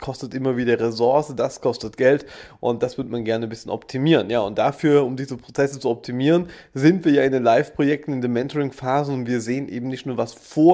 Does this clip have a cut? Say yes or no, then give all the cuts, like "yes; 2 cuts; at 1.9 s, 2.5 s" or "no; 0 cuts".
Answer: no; 0 cuts